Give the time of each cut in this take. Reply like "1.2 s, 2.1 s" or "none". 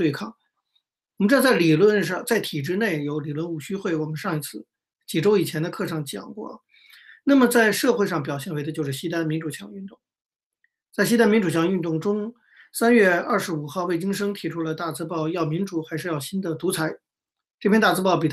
none